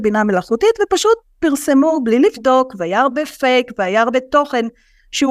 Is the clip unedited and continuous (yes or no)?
yes